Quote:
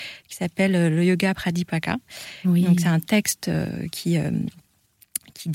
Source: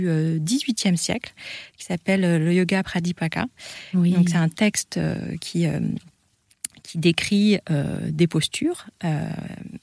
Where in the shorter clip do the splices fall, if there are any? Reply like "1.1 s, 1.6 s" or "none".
none